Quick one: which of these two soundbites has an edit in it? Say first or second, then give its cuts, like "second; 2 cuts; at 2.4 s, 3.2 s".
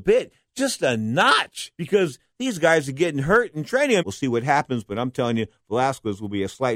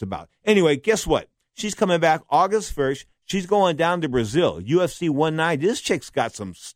first; 2 cuts; at 1.7 s, 4.0 s